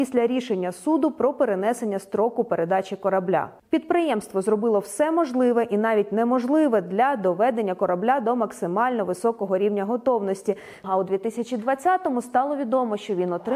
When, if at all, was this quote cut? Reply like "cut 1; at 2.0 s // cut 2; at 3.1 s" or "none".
cut 1; at 3.6 s // cut 2; at 10.8 s